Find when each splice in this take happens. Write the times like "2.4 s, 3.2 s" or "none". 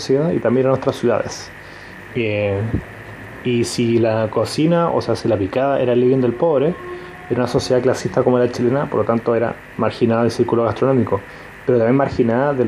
2.1 s